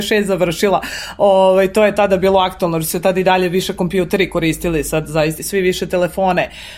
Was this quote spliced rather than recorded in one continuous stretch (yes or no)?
yes